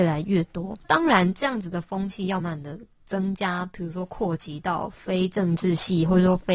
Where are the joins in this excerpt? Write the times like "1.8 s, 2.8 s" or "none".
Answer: 2.4 s